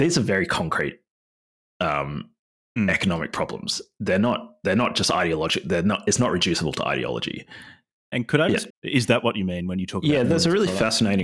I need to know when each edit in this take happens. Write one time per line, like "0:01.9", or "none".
0:08.7